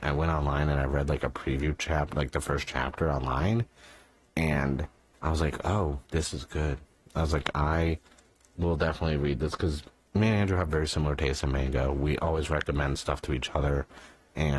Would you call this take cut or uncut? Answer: cut